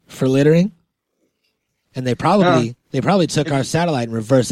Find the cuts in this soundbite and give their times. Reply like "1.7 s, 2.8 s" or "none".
1.9 s